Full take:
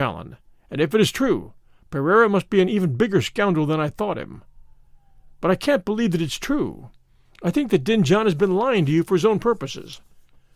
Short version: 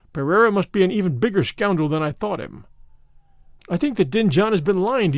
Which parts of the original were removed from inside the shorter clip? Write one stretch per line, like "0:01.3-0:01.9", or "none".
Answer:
0:05.4-0:07.3